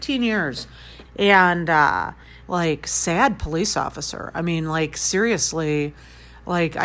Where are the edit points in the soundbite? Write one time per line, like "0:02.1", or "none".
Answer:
0:01.0
0:02.4